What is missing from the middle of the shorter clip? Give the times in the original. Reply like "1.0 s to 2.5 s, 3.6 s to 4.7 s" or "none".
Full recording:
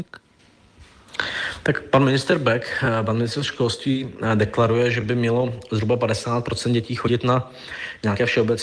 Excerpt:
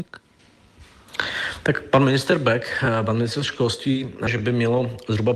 4.3 s to 4.9 s